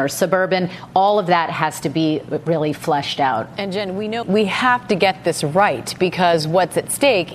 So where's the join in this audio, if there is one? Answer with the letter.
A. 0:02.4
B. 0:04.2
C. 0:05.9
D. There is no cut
B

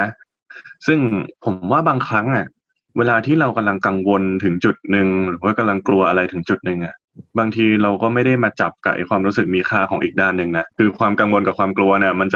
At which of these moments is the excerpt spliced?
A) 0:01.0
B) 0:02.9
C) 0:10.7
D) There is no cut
C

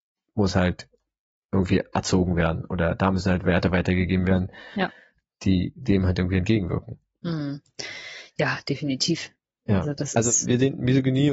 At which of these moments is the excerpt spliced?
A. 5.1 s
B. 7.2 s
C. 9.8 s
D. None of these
D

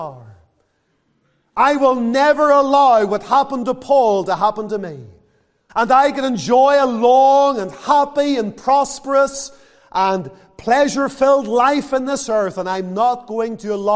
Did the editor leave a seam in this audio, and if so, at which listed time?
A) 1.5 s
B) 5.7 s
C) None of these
B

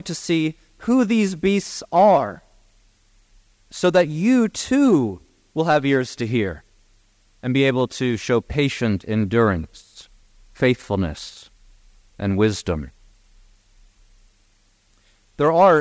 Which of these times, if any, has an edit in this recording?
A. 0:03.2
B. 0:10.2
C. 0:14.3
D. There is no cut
D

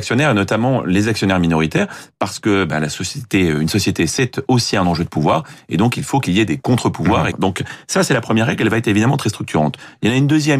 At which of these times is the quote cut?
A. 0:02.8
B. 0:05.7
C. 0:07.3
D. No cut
C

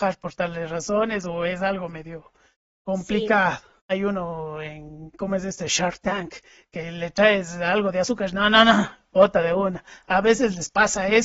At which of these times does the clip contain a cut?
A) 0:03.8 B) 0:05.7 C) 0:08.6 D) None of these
A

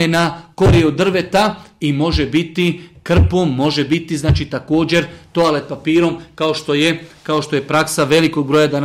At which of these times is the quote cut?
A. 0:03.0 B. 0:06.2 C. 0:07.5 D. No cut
D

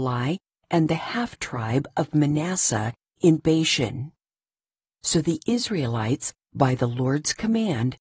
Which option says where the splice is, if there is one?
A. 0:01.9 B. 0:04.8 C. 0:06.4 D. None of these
B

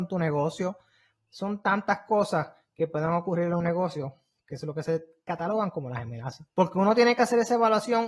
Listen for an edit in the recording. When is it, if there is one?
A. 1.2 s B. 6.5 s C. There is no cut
B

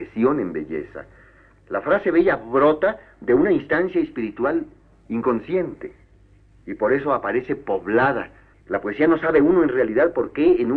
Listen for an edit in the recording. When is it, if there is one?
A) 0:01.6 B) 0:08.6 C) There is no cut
B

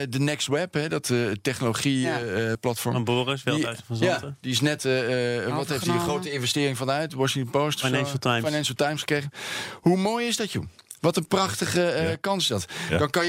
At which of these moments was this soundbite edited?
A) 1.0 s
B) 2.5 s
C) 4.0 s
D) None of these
B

